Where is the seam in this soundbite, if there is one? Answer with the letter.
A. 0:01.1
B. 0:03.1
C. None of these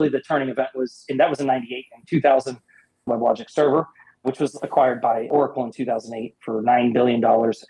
B